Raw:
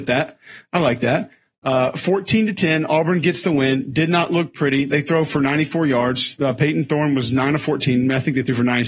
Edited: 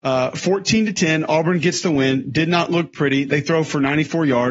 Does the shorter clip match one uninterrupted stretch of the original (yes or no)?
yes